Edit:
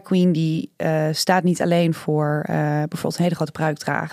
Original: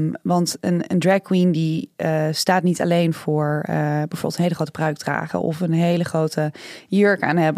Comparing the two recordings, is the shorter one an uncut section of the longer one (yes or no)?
yes